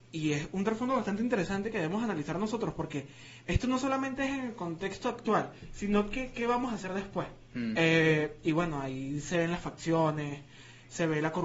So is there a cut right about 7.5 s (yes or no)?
yes